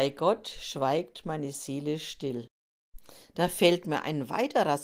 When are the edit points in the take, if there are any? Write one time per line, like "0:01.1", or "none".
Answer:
none